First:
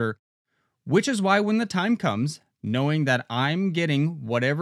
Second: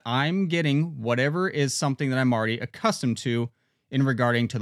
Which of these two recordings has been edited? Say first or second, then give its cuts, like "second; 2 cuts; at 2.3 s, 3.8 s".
first; 1 cut; at 2.5 s